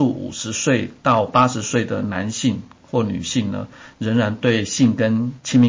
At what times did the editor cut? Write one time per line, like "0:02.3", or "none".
none